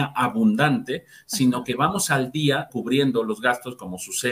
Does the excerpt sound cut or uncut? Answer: cut